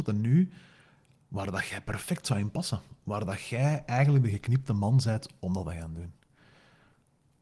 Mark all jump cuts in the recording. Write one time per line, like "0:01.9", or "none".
none